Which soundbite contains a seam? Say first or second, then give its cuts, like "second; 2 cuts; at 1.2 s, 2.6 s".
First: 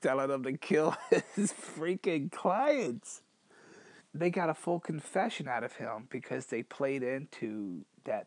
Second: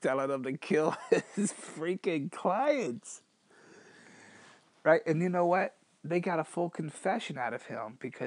first; 1 cut; at 4.0 s